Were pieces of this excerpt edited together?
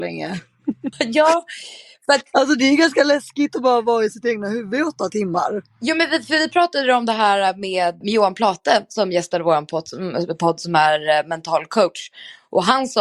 yes; 2 cuts; at 0.9 s, 8.0 s

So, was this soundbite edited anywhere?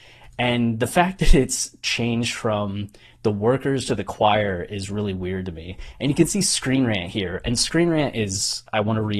no; 0 cuts

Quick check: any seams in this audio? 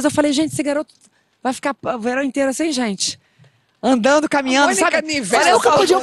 no; 0 cuts

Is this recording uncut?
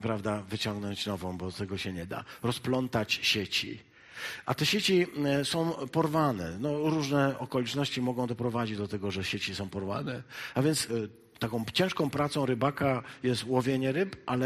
no; 1 cut; at 10.9 s

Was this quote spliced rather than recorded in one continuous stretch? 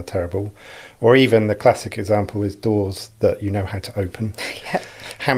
no; 0 cuts

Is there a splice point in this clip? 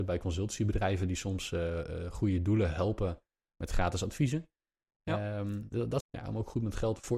yes; 1 cut; at 6.0 s

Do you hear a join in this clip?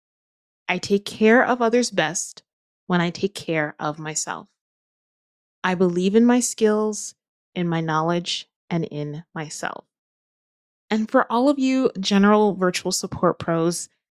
no; 0 cuts

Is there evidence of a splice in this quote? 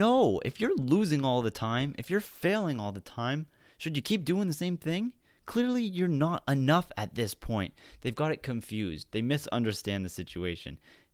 no; 0 cuts

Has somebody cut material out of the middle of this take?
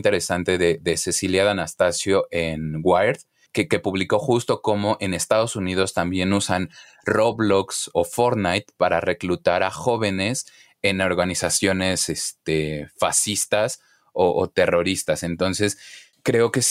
yes; 1 cut; at 7.9 s

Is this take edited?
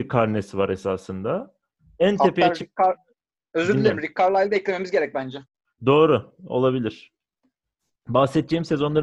no; 0 cuts

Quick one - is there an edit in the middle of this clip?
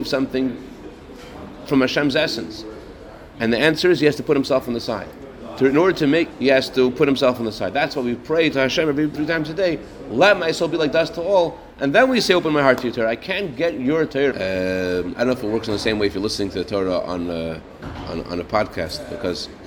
yes; 3 cuts; at 6.3 s, 9.1 s, 14.3 s

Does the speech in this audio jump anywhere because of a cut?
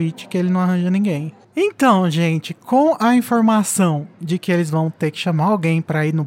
yes; 1 cut; at 1.4 s

